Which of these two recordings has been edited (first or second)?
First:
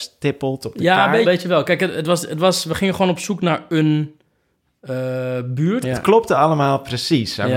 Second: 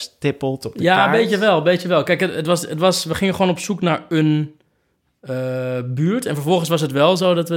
first